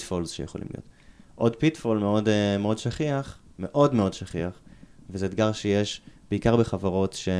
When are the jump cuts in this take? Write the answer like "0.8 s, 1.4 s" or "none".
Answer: none

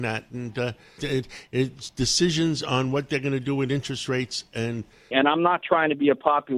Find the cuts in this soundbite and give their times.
1.0 s, 5.1 s

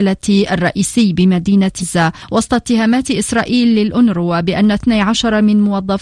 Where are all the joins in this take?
1.8 s

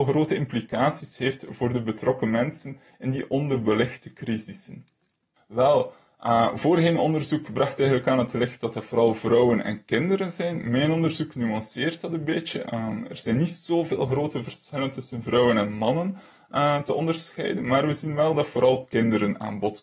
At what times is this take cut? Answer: 5.4 s

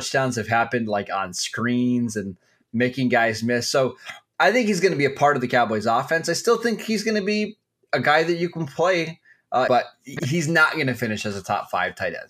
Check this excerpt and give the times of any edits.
9.7 s

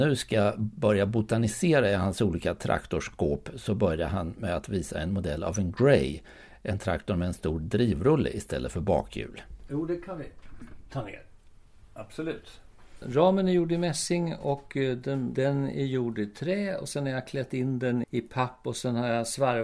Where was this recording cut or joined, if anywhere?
15.3 s, 18.0 s

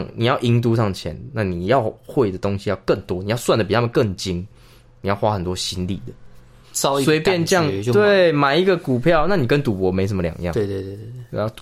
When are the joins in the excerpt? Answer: 6.6 s

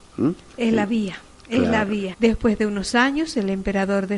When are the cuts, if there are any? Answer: 2.1 s

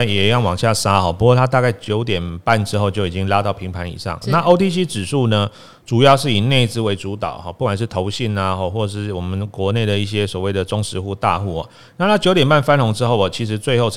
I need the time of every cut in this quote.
4.2 s

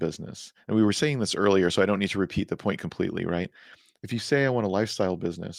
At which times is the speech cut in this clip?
none

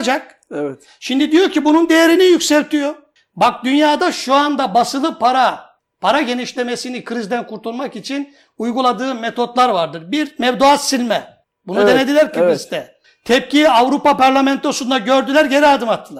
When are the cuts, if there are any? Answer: none

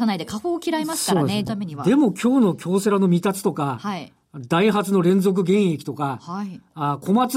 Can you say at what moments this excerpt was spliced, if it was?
1.5 s

